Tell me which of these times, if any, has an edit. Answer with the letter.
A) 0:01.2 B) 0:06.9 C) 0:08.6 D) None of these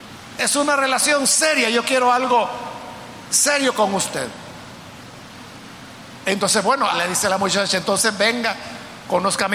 B